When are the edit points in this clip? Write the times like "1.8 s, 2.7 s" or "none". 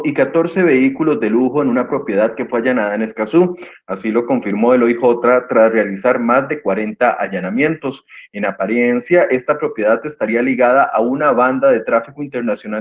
none